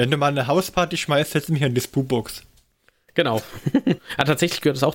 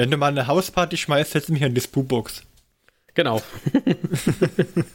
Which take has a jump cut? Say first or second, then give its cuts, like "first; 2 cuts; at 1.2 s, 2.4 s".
first; 1 cut; at 4.0 s